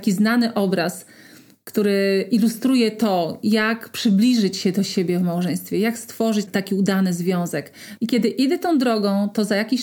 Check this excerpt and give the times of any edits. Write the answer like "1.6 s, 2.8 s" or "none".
8.0 s